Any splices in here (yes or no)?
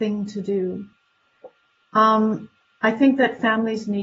no